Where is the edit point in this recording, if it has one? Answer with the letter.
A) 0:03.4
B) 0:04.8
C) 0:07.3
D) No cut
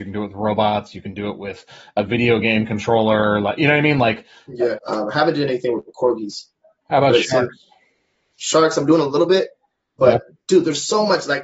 B